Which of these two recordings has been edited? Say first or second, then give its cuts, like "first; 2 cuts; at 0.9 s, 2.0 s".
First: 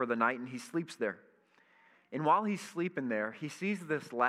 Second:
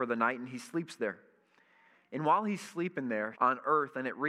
second; 1 cut; at 3.3 s